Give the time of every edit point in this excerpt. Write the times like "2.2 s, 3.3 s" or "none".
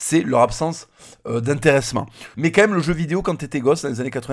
2.3 s